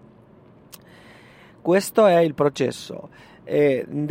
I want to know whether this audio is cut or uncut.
uncut